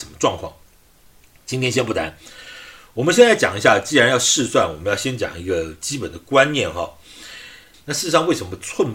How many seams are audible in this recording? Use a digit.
1